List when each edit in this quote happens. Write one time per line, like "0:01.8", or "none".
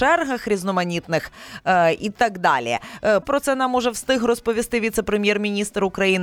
0:03.2